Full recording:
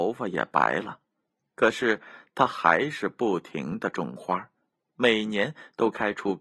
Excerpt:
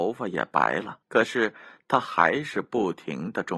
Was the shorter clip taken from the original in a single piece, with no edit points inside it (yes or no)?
no